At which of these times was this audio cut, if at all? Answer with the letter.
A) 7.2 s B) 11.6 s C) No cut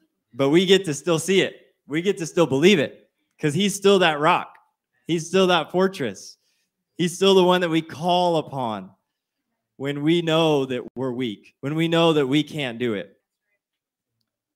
B